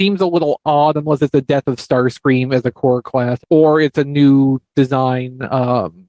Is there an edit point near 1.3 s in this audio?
yes; 2 cuts; at 1.3 s, 3.4 s

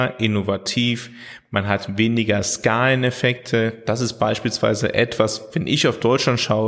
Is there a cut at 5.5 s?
no; 0 cuts

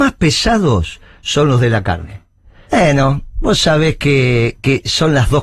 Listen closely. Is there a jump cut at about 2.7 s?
yes; 1 cut; at 2.7 s

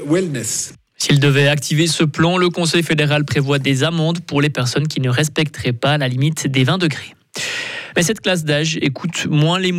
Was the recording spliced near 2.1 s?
no; 1 cut; at 7.9 s

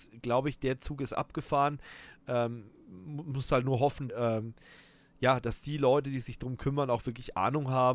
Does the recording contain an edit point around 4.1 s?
yes; 1 cut; at 4.1 s

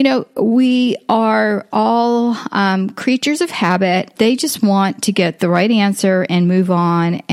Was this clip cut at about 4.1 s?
yes; 1 cut; at 4.1 s

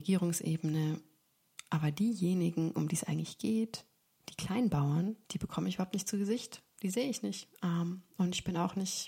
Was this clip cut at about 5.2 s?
yes; 1 cut; at 5.2 s

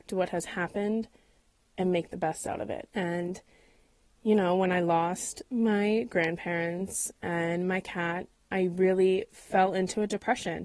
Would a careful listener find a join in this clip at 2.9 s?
yes; 1 cut; at 2.9 s

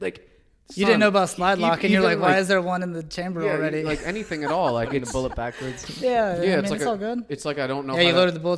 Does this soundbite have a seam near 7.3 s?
no; 0 cuts

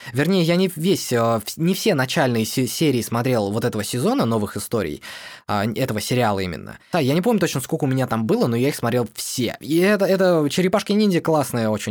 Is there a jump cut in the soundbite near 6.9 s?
yes; 1 cut; at 6.9 s

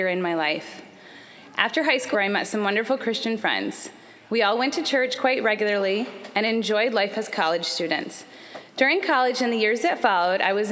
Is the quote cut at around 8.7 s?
no; 1 cut; at 2.1 s

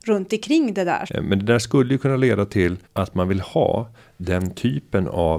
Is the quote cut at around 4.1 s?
no; 2 cuts; at 1.1 s, 2.8 s

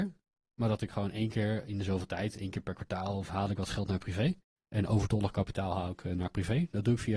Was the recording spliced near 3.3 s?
yes; 2 cuts; at 3.3 s, 4.6 s

